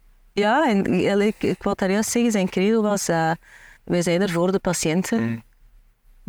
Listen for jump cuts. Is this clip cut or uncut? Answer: cut